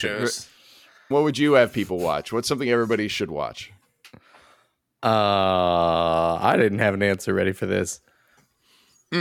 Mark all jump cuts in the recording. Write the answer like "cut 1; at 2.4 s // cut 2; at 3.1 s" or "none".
cut 1; at 1.1 s